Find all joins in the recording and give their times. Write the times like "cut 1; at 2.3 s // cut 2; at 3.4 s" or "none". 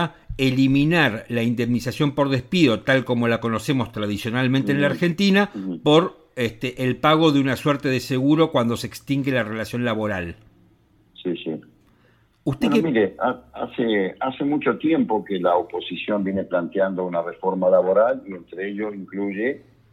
none